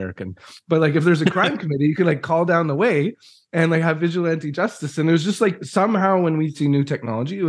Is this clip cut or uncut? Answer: uncut